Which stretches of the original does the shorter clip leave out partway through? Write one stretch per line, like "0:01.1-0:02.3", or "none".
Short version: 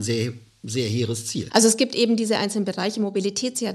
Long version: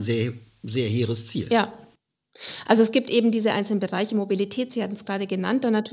0:01.5-0:02.6